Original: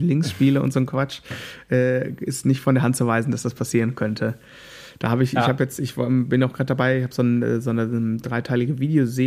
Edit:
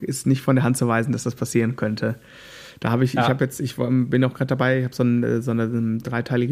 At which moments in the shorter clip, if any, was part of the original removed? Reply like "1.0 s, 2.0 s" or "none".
none